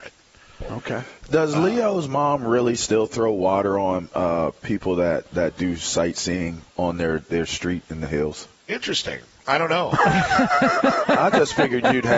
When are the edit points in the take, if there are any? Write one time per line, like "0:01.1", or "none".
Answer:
0:06.7